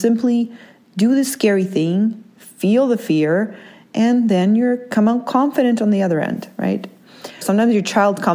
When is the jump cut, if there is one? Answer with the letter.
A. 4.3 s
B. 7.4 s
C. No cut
B